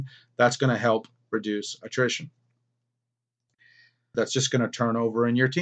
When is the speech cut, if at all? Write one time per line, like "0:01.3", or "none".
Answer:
0:04.1